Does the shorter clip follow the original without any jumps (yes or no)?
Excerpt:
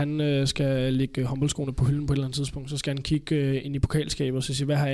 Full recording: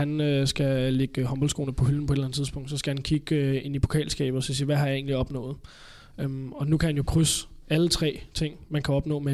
yes